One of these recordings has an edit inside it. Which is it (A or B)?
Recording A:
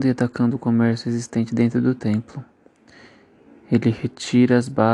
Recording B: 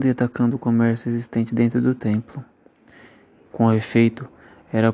B